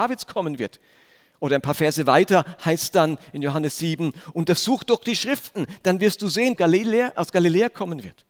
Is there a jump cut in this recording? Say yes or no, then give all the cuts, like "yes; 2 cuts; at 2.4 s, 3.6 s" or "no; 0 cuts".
yes; 1 cut; at 6.6 s